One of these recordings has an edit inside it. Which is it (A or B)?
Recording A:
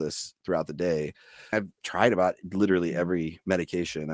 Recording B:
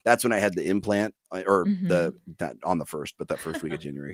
B